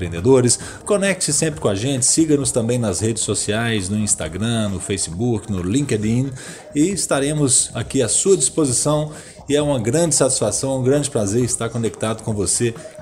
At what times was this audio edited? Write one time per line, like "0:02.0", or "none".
none